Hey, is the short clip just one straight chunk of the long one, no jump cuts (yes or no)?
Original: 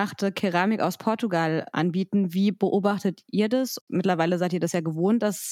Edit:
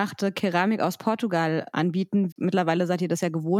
no